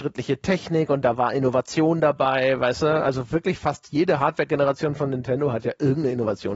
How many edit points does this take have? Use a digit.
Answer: 0